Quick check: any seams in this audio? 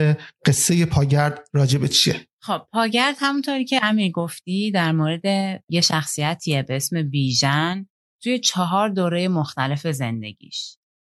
yes; 1 cut; at 2.3 s

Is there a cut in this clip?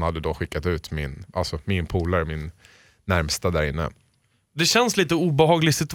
yes; 1 cut; at 1.3 s

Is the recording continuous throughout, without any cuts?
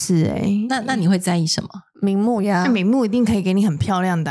no; 1 cut; at 1.9 s

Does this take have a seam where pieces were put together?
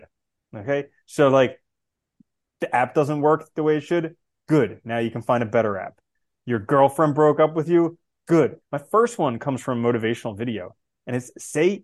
yes; 1 cut; at 8.6 s

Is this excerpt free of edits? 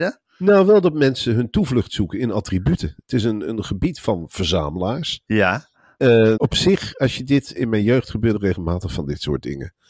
no; 2 cuts; at 6.4 s, 7.6 s

